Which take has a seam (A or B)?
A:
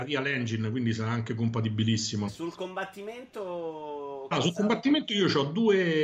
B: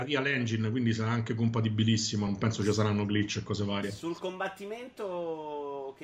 A